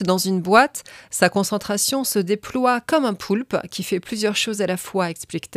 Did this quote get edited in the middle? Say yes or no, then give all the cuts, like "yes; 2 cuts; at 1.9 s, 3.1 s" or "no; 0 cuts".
no; 0 cuts